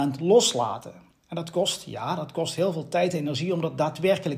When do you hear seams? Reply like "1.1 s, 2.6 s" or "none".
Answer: none